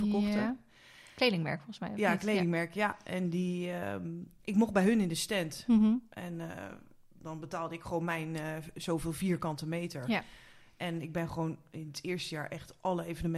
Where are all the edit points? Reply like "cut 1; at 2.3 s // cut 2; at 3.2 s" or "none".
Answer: none

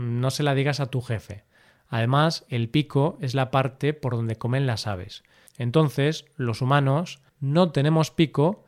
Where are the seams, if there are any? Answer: cut 1; at 5.5 s // cut 2; at 7.3 s

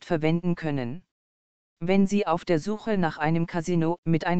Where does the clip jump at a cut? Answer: cut 1; at 1.6 s

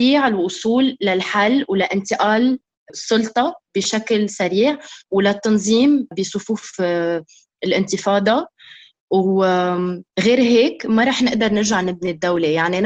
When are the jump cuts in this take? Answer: cut 1; at 10.1 s

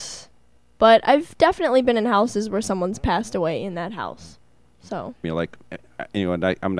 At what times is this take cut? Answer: cut 1; at 5.2 s

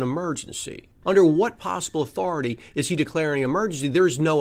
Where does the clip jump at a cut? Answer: cut 1; at 1.0 s

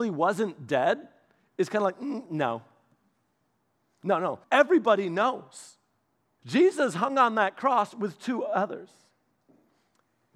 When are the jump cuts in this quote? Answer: cut 1; at 4.4 s // cut 2; at 6.4 s

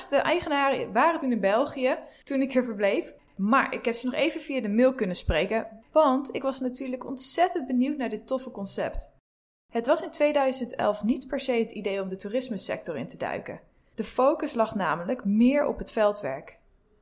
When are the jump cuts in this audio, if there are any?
none

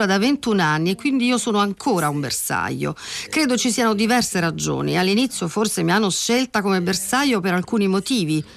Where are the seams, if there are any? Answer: none

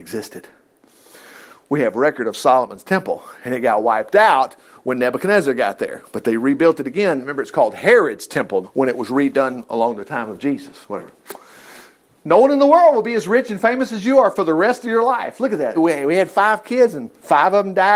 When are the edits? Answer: cut 1; at 8.6 s // cut 2; at 15.7 s

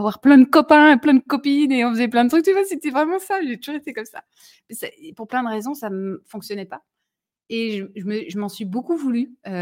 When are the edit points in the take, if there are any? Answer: none

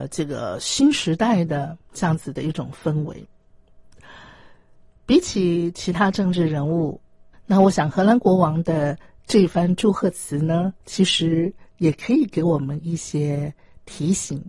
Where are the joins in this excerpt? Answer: cut 1; at 7.3 s // cut 2; at 10.8 s

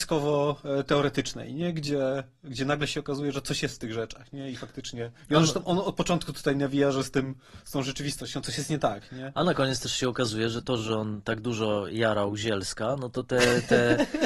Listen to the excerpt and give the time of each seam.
none

